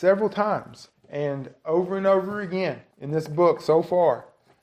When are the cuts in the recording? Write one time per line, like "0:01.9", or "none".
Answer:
0:00.9
0:02.9